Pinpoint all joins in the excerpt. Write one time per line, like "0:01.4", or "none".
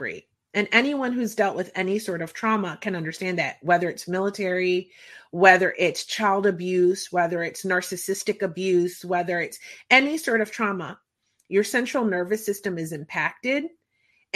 none